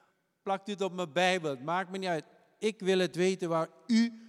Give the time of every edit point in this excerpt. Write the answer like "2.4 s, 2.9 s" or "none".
none